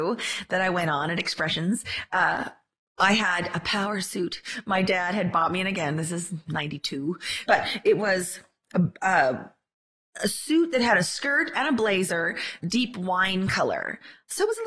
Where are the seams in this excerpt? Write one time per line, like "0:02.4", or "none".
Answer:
0:07.5
0:12.6